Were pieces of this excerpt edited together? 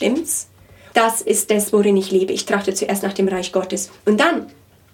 yes; 1 cut; at 0.9 s

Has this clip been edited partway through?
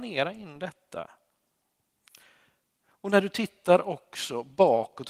no; 0 cuts

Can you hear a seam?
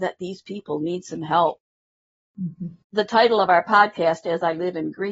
no; 0 cuts

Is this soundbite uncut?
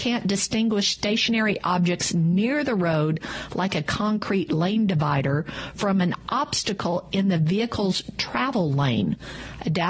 yes; 0 cuts

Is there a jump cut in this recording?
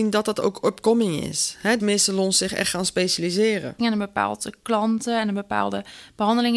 yes; 2 cuts; at 1.8 s, 3.8 s

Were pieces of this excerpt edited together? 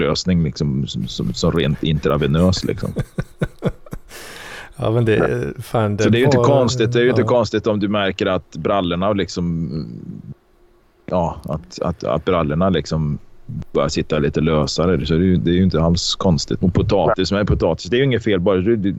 yes; 1 cut; at 16.6 s

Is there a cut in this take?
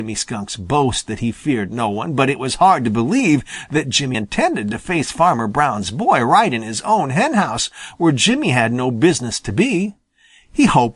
yes; 1 cut; at 4.1 s

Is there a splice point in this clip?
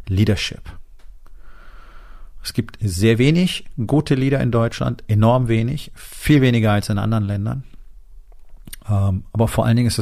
no; 0 cuts

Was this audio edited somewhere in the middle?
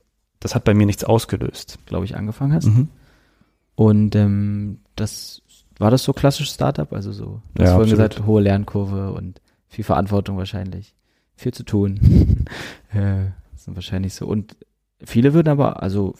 yes; 2 cuts; at 1.8 s, 13.5 s

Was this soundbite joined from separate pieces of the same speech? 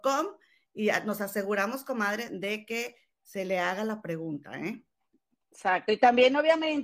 no; 0 cuts

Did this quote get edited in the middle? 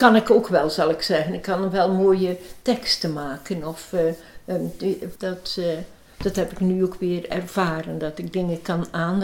yes; 1 cut; at 5.2 s

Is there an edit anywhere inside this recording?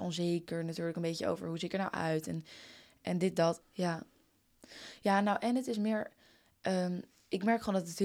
yes; 1 cut; at 3.6 s

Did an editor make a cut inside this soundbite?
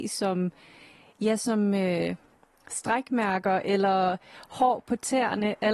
no; 0 cuts

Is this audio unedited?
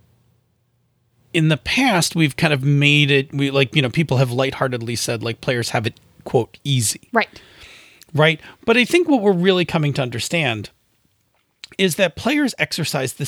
yes; 0 cuts

